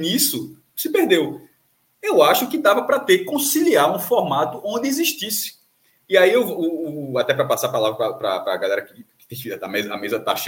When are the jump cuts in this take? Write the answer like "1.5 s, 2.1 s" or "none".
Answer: none